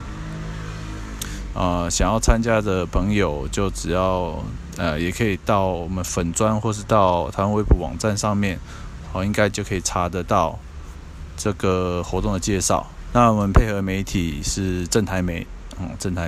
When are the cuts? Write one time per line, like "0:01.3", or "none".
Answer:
0:01.5
0:09.1
0:13.1